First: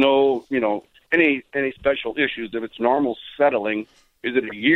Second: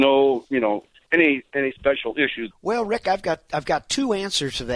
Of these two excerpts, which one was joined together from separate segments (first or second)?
second